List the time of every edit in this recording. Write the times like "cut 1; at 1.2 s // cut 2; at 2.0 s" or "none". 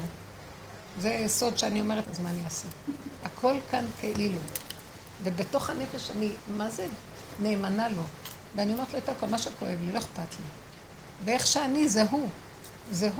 cut 1; at 2.0 s // cut 2; at 3.2 s

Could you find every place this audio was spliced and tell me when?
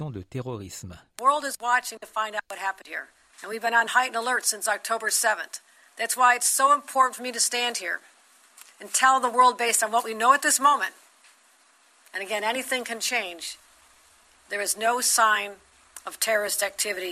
cut 1; at 3.3 s

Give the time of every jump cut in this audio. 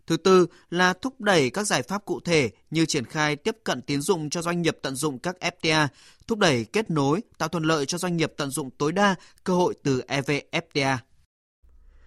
none

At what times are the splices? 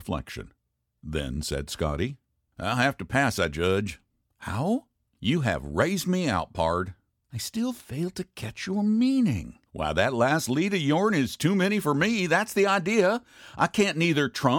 cut 1; at 9.7 s

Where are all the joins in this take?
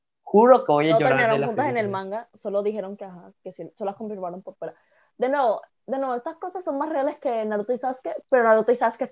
none

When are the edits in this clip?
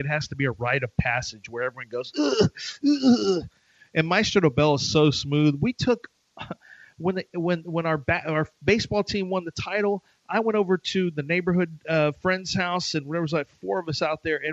none

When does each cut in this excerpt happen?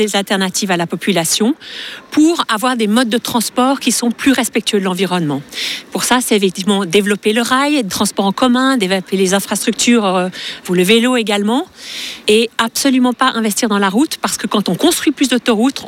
none

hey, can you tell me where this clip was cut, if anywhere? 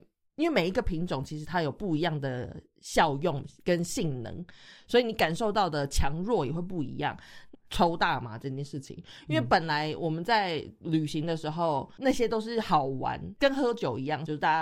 cut 1; at 3.6 s // cut 2; at 7.5 s // cut 3; at 13.4 s

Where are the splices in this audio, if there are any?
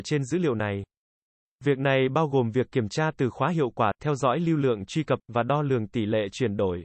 none

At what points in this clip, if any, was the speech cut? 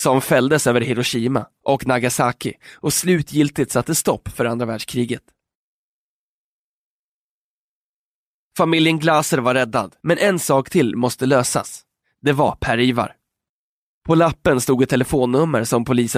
cut 1; at 10.0 s // cut 2; at 12.0 s

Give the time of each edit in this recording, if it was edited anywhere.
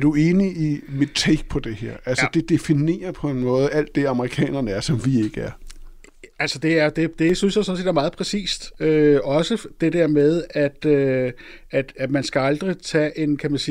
none

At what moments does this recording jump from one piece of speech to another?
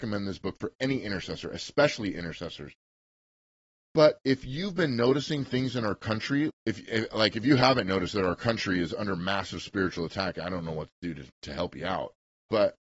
cut 1; at 6.5 s

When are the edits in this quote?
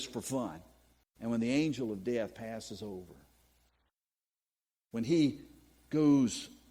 cut 1; at 1.0 s

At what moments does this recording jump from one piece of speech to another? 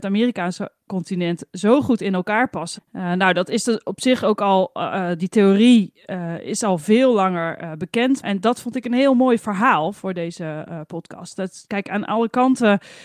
cut 1; at 2.8 s // cut 2; at 8.2 s

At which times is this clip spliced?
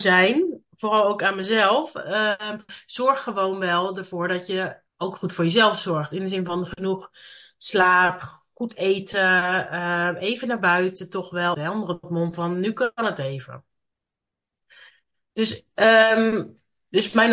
cut 1; at 11.5 s

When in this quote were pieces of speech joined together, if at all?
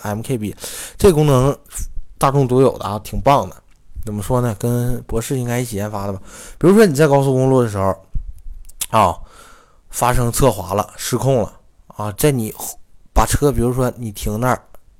cut 1; at 12.2 s

